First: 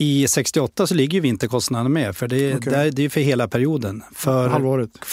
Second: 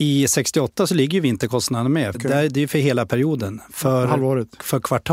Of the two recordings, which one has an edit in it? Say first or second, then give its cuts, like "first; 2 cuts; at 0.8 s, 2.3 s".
second; 1 cut; at 2.1 s